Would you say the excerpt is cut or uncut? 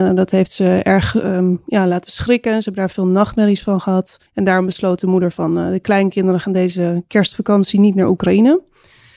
cut